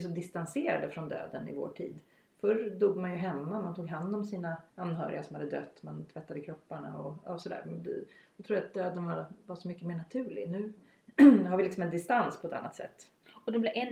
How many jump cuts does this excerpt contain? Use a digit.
1